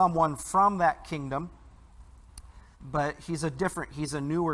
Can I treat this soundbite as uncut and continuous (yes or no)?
no